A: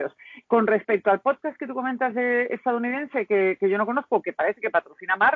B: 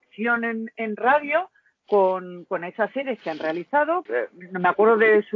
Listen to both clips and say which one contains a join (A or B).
B